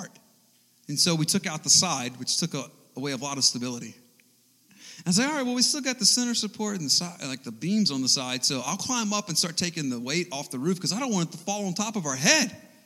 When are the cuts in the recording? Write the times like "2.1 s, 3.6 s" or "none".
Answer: none